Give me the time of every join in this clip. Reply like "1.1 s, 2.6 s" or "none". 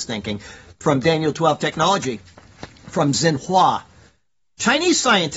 none